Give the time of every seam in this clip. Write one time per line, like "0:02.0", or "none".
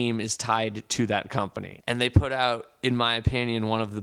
0:01.8